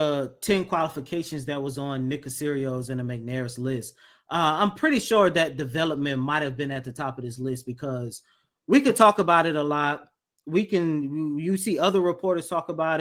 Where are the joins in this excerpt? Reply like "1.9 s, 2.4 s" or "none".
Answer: none